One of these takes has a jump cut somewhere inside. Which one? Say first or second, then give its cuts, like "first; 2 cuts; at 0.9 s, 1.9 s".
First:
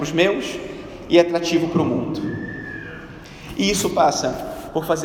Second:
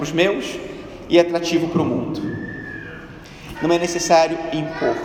second; 1 cut; at 3.5 s